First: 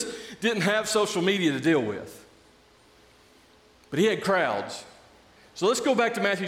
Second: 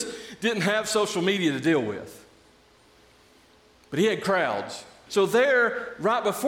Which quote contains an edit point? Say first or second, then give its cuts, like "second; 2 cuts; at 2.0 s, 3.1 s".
second; 1 cut; at 5.1 s